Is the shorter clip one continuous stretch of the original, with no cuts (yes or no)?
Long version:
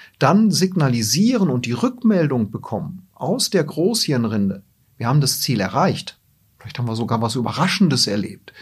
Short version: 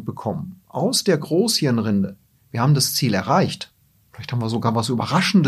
yes